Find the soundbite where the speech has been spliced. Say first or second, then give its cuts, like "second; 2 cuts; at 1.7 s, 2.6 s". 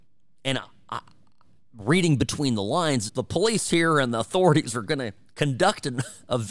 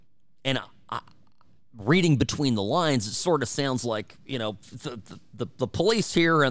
first; 1 cut; at 3.1 s